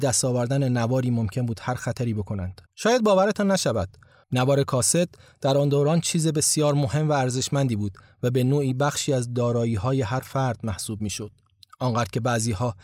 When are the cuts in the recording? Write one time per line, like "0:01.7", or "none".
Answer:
0:02.7
0:04.2